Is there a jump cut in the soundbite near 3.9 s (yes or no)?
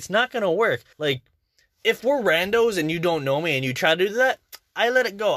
no